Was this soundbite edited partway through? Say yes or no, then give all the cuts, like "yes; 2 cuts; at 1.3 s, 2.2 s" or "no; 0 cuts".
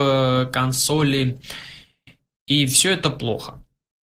no; 0 cuts